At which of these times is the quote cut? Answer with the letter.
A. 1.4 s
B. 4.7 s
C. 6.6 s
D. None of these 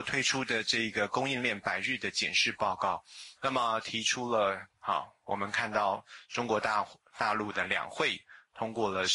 B